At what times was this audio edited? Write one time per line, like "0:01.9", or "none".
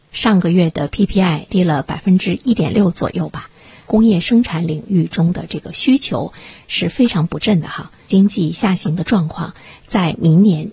none